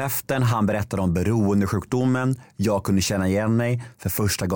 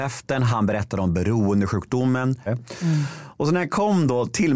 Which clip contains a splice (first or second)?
second